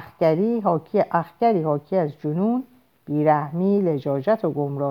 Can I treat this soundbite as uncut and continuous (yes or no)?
yes